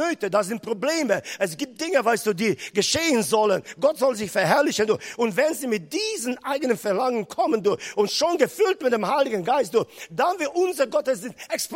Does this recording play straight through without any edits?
yes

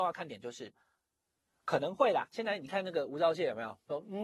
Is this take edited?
no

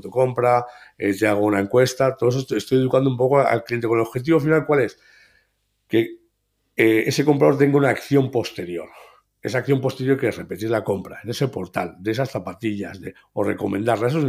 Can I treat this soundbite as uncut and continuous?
yes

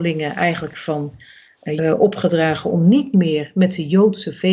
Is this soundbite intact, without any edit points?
no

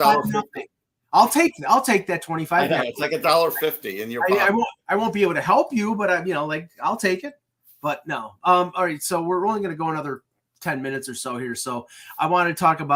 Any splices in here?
no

